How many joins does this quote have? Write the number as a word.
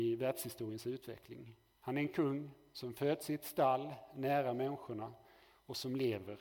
one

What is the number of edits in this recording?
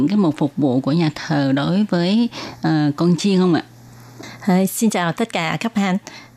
zero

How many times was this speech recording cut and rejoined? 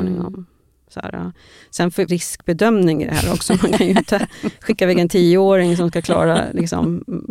one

